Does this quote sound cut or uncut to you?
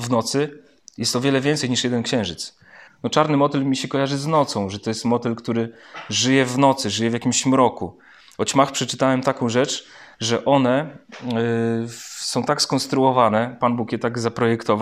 cut